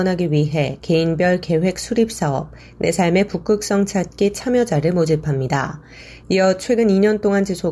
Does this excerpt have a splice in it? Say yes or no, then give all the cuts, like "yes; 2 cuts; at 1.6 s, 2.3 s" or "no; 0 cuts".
yes; 1 cut; at 6.2 s